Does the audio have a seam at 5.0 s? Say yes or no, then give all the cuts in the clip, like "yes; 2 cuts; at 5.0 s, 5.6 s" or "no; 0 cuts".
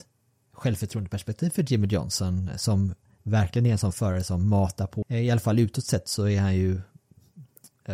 yes; 1 cut; at 5.0 s